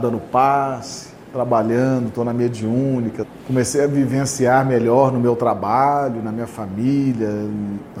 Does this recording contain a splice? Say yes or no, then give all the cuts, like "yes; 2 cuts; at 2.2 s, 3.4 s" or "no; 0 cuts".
no; 0 cuts